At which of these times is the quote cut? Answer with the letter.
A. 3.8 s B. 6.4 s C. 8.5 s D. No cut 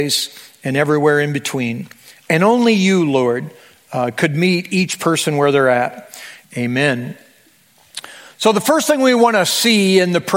B